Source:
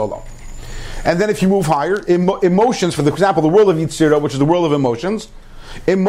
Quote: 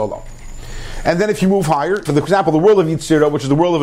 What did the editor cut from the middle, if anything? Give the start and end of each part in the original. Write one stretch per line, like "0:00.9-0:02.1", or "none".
0:02.1-0:03.0